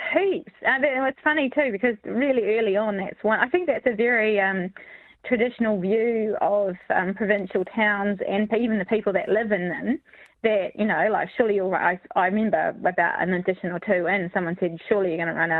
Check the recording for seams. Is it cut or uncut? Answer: uncut